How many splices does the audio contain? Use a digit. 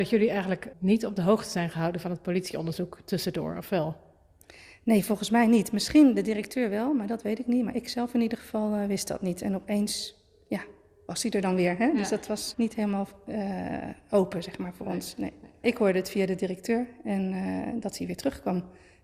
1